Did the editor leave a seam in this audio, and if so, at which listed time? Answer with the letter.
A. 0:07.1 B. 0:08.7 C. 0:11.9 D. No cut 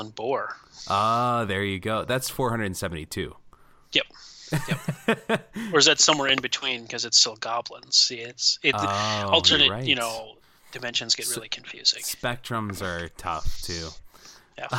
D